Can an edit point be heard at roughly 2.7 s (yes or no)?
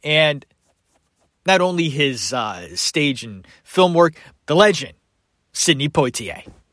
no